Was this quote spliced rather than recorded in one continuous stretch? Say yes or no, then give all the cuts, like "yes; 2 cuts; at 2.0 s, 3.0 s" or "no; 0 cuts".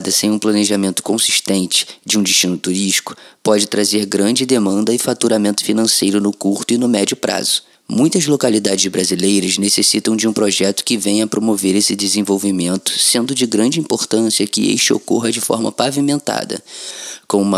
yes; 1 cut; at 7.7 s